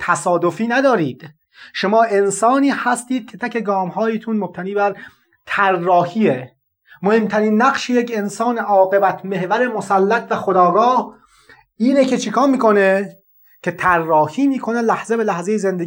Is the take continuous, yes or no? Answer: no